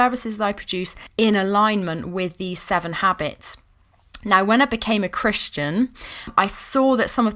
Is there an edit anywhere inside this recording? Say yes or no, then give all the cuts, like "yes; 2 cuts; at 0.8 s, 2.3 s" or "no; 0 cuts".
no; 0 cuts